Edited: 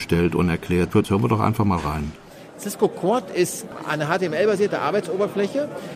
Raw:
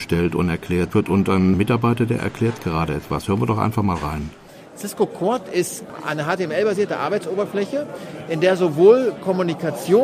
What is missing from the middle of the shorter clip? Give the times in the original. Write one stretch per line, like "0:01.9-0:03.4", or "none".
0:01.0-0:03.2